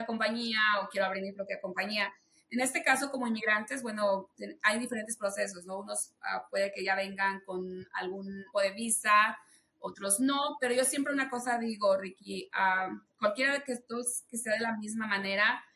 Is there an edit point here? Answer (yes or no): yes